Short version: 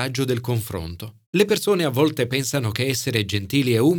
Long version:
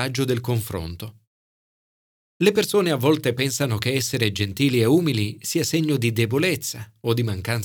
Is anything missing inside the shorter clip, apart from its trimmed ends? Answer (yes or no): yes